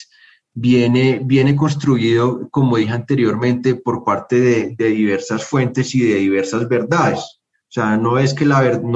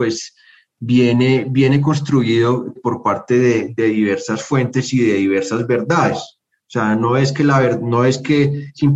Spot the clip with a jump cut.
second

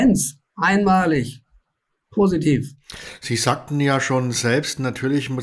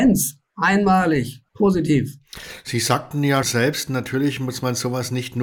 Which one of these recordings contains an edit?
second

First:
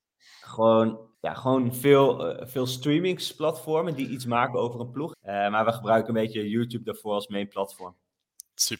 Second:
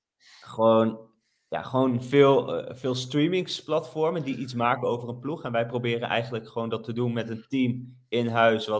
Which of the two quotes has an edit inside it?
first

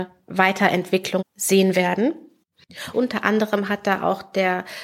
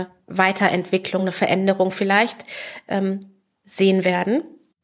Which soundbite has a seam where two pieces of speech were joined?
first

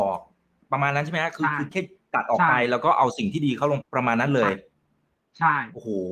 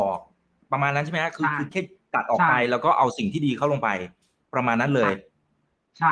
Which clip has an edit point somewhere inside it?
first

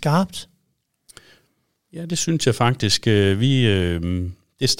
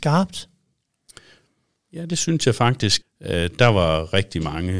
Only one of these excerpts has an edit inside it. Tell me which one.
second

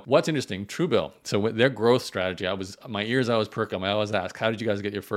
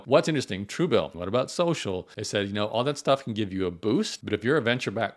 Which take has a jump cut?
second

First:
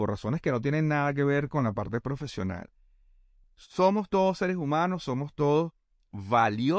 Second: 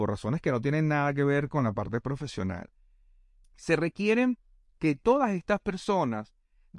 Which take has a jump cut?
second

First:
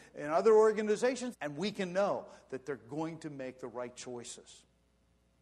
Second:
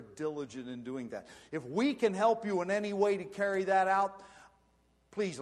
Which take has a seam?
first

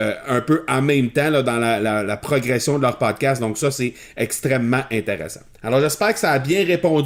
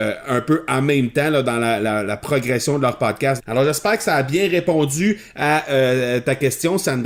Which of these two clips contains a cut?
second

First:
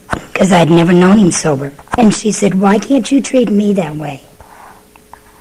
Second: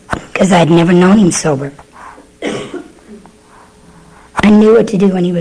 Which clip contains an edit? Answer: first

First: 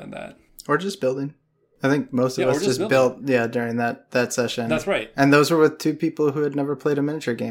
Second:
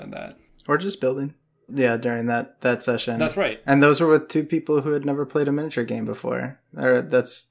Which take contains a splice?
second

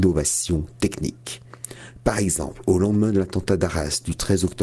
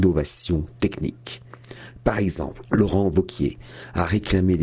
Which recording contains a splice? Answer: second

